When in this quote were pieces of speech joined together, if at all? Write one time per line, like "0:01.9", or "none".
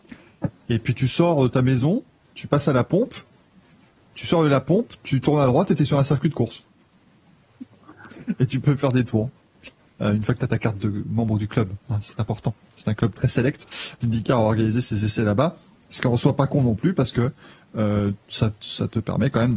0:14.0